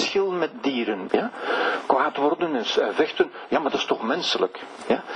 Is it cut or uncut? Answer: cut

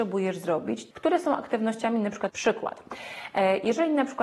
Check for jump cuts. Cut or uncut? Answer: cut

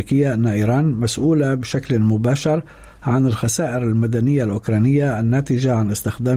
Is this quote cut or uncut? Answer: uncut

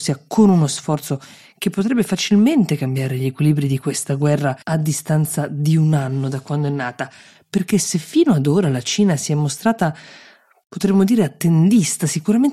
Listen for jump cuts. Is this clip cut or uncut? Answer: cut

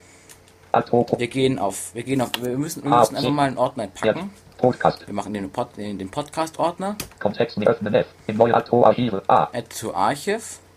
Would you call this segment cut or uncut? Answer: cut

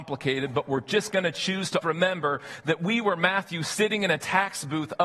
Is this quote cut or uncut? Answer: cut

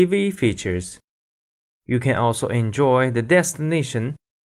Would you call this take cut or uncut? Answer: uncut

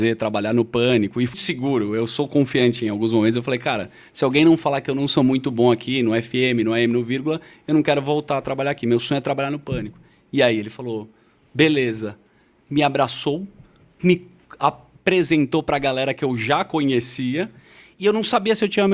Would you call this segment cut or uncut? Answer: cut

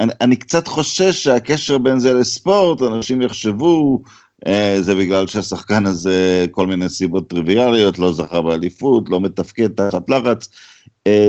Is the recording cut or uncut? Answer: uncut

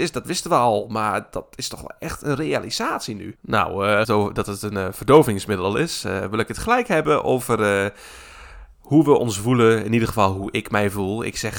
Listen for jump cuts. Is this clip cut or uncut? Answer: cut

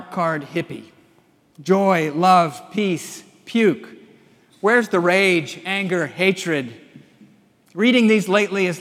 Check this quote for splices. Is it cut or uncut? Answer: uncut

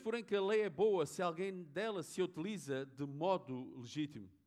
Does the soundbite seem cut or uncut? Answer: uncut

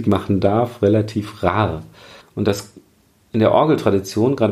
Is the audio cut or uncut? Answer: cut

